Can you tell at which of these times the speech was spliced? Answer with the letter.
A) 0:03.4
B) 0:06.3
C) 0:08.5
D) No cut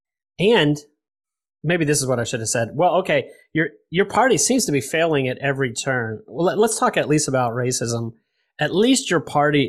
D